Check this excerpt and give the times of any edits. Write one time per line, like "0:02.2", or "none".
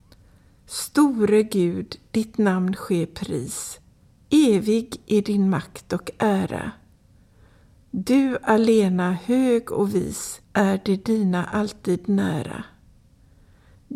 0:10.4